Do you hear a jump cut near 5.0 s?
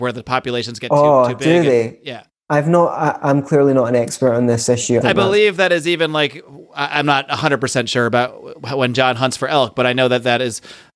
yes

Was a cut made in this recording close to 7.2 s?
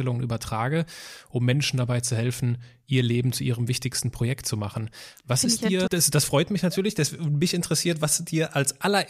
no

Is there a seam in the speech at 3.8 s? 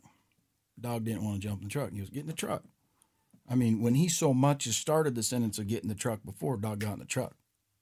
no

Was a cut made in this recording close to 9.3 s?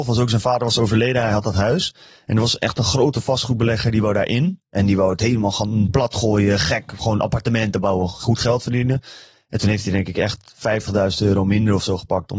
no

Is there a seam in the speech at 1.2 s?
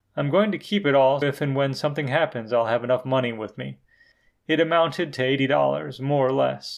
yes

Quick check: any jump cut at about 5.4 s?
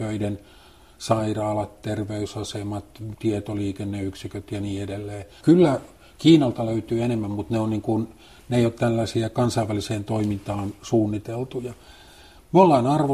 yes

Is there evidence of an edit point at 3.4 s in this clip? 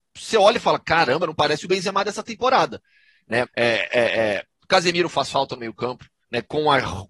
yes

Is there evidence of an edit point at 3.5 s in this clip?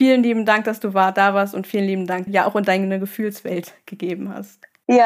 no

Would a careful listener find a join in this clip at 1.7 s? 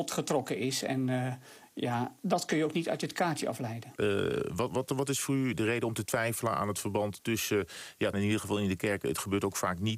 no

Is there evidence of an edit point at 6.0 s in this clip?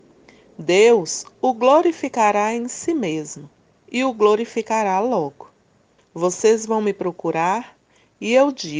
yes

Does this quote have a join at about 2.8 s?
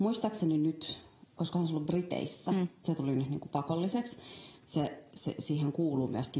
no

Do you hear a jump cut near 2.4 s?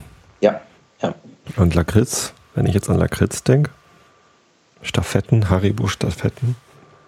no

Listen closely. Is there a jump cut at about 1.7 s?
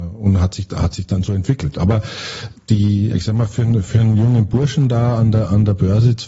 no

